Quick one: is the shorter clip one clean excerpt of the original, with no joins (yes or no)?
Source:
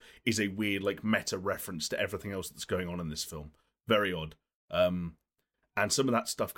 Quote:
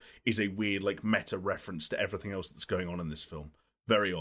yes